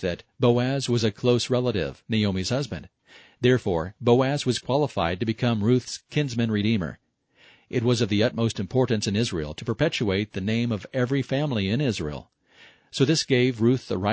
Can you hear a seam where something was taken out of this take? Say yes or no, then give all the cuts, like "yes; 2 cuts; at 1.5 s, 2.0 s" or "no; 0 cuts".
yes; 1 cut; at 2.1 s